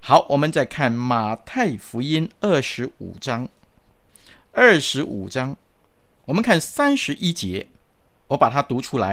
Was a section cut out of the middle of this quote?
no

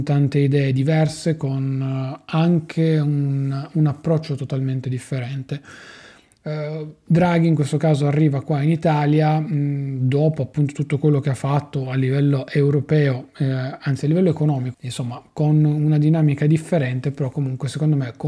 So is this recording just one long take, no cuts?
no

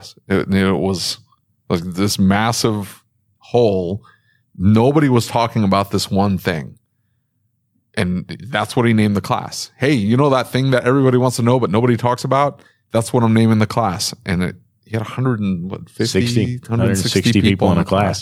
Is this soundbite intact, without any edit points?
yes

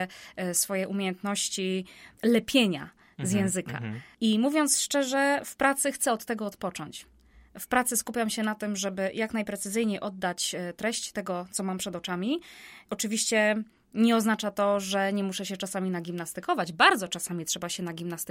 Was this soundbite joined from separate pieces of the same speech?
no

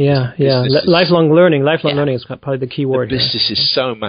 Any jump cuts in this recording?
no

